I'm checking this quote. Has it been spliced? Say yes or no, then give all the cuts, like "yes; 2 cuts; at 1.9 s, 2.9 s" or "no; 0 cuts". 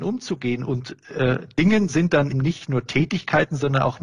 yes; 1 cut; at 2.3 s